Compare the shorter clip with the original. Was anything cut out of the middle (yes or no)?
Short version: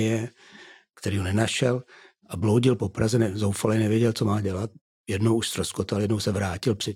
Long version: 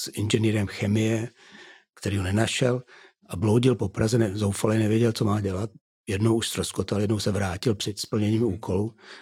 no